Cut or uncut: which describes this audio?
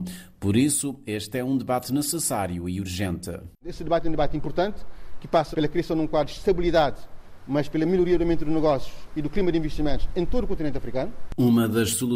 cut